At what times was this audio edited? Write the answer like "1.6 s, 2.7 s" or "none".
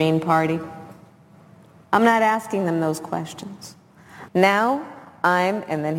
4.3 s

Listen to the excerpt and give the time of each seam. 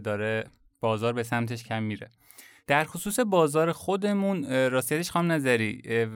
1.7 s

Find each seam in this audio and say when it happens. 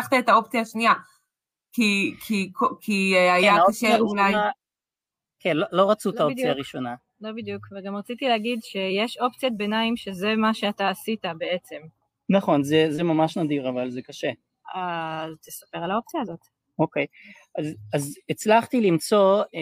none

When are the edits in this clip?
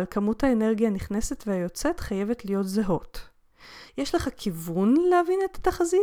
3.9 s

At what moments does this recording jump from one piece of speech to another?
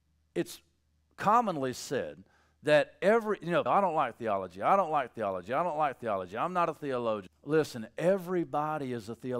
3.7 s, 7.3 s

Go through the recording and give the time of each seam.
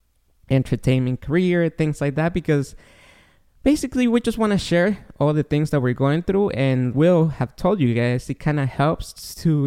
6.9 s

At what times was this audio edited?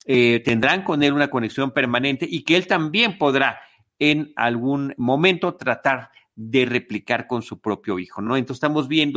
none

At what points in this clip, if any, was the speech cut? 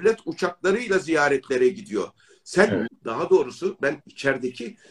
2.9 s, 4.0 s

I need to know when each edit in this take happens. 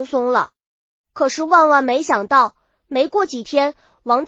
none

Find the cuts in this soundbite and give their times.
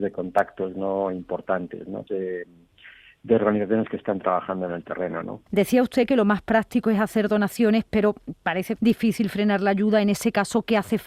2.1 s, 5.5 s, 8.8 s

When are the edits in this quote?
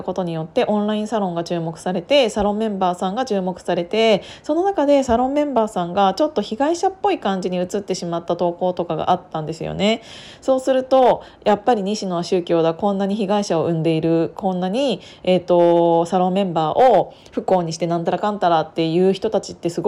none

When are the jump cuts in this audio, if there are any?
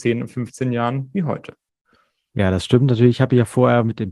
none

